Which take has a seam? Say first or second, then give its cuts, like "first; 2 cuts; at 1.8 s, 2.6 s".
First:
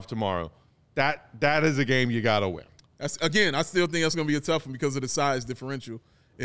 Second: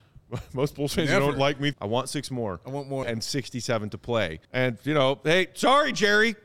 second; 3 cuts; at 1.7 s, 3.0 s, 4.4 s